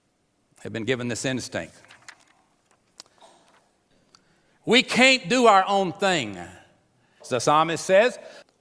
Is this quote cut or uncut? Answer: cut